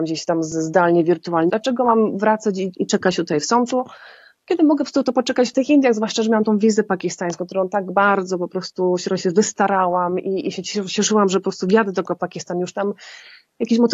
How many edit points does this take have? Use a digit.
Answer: 1